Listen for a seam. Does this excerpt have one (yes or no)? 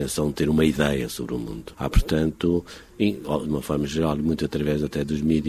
yes